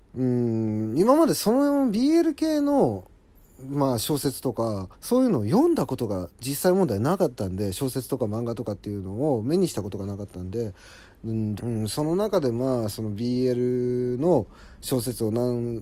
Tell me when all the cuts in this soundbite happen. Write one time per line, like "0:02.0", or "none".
0:04.9
0:11.6